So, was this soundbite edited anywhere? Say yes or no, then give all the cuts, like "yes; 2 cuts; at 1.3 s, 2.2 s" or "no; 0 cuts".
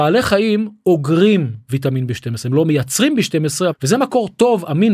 yes; 1 cut; at 3.7 s